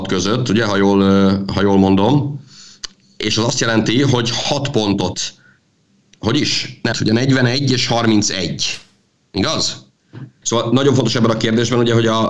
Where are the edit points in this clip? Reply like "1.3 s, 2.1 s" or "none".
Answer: 6.9 s, 10.4 s